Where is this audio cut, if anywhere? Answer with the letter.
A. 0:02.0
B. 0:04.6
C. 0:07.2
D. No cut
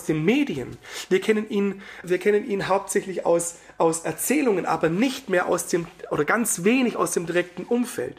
A